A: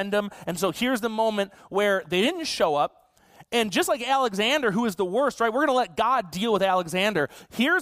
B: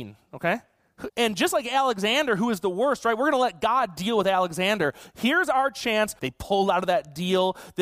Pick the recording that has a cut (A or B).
B